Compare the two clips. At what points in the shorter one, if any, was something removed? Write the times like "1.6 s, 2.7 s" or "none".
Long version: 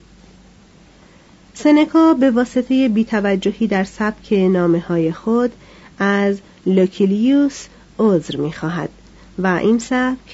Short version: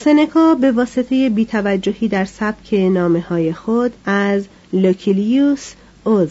4.0 s